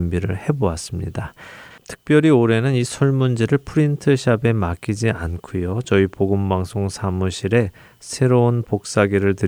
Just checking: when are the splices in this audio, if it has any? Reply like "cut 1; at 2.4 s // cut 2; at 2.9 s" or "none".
cut 1; at 1.7 s